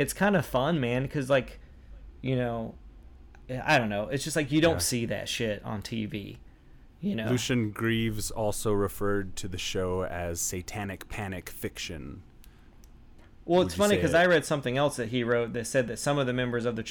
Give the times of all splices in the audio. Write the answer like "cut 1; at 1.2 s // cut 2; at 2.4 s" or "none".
none